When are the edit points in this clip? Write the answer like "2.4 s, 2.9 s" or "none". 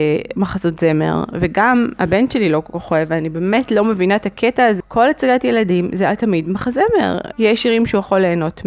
4.8 s, 7.3 s